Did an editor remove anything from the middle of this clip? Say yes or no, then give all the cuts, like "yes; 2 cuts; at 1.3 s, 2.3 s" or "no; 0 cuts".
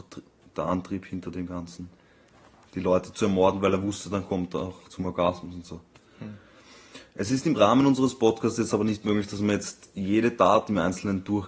no; 0 cuts